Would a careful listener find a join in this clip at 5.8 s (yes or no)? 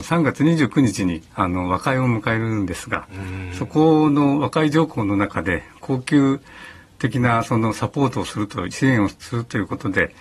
no